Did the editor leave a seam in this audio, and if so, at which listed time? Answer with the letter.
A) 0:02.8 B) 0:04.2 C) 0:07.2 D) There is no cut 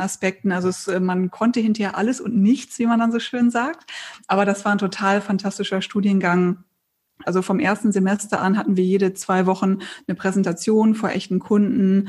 C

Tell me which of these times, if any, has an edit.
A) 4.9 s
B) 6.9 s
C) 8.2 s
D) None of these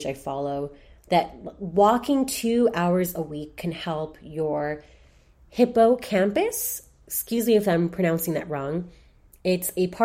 D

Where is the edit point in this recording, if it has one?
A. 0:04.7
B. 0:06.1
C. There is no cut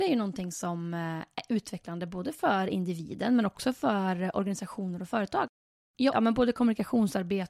B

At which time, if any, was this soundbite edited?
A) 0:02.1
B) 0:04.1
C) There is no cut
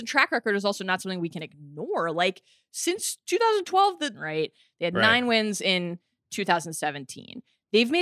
B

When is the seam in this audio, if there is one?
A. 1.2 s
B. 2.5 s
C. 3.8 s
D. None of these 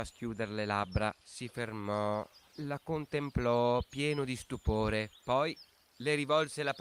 A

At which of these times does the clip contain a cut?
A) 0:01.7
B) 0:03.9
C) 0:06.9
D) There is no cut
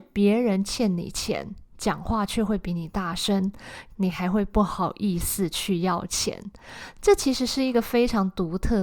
B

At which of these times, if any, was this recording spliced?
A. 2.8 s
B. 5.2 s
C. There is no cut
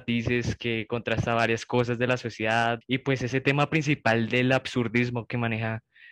A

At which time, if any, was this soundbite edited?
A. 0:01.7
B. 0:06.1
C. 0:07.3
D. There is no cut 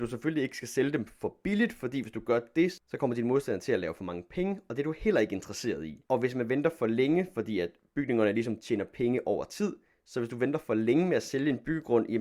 B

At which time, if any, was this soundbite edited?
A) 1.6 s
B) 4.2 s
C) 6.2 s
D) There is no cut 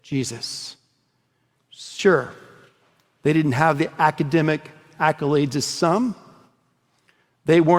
A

